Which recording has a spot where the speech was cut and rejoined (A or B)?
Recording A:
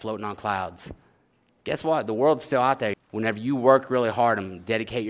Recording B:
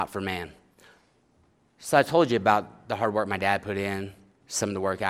A